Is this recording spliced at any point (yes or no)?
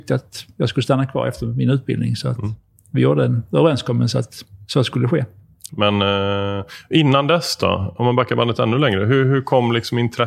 yes